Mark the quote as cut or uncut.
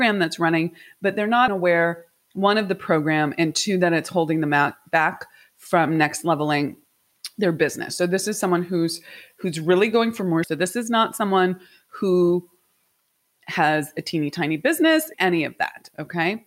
cut